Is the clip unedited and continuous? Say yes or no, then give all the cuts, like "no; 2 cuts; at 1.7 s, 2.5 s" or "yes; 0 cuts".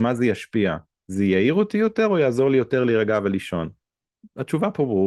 yes; 0 cuts